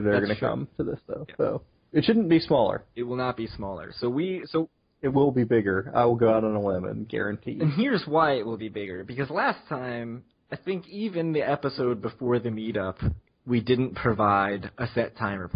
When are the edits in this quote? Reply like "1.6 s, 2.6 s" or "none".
none